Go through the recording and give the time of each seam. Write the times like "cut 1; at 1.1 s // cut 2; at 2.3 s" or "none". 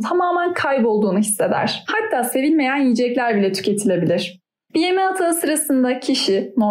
cut 1; at 1.9 s // cut 2; at 4.7 s